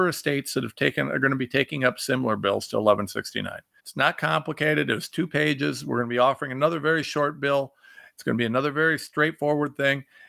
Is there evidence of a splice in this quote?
yes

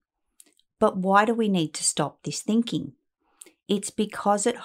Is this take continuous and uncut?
yes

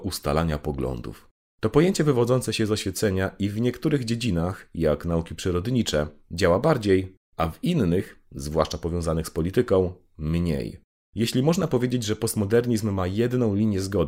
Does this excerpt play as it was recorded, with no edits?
yes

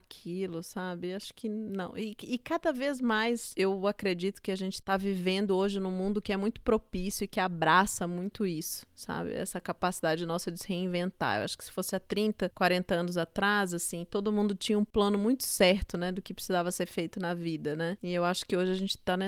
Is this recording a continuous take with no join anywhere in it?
yes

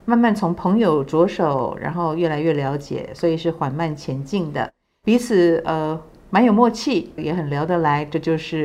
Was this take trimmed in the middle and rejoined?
yes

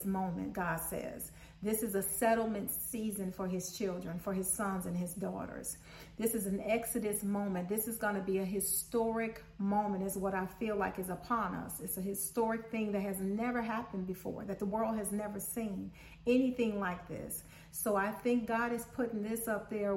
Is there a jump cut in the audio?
no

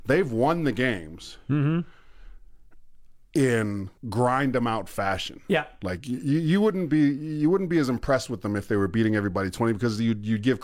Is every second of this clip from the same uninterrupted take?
no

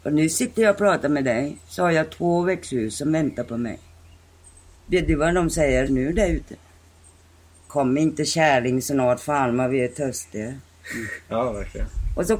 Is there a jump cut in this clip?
yes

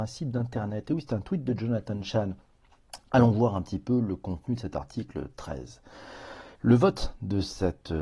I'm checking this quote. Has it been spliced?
yes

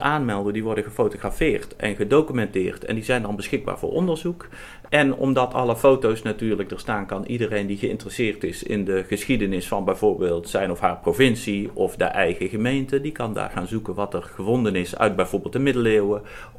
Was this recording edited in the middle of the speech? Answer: no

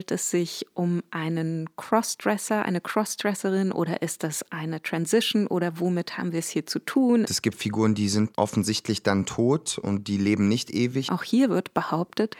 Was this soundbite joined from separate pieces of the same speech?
yes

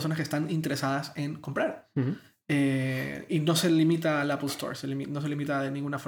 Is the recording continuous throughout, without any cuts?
yes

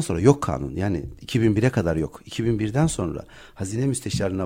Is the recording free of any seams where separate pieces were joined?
yes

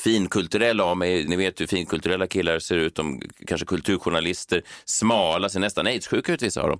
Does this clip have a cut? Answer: no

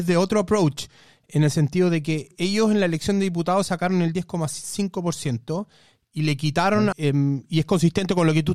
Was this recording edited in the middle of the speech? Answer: yes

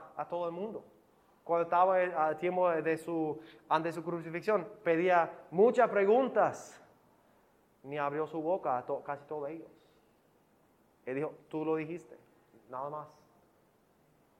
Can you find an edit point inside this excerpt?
no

